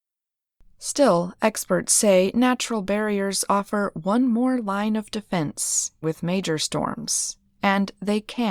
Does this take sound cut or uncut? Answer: cut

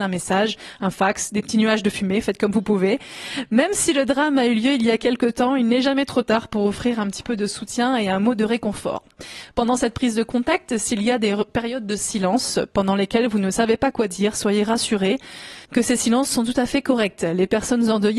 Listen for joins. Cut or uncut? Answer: cut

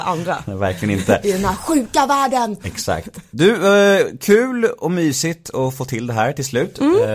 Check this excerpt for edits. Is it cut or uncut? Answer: uncut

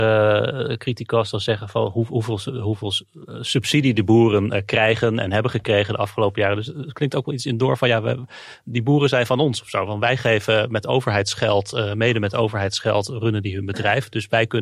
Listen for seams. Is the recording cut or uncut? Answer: uncut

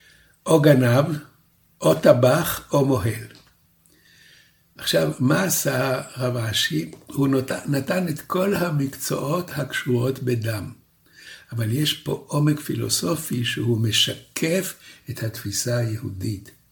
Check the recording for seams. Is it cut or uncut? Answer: uncut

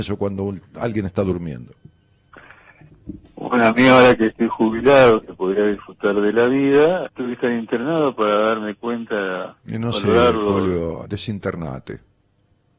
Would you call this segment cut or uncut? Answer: cut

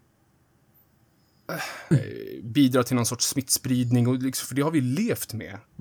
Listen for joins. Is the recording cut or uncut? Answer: cut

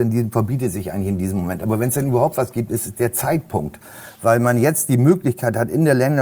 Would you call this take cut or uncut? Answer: uncut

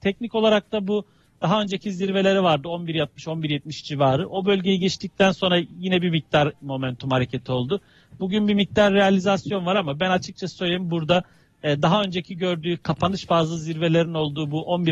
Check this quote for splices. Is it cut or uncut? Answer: uncut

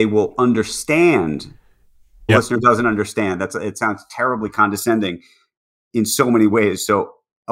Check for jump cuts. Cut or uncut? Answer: cut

